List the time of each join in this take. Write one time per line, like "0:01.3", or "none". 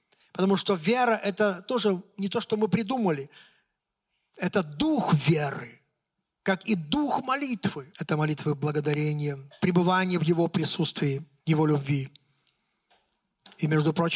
0:07.9
0:09.5
0:11.4